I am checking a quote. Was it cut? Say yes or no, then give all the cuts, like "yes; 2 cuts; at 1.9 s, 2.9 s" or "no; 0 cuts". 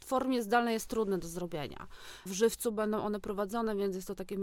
yes; 1 cut; at 2.3 s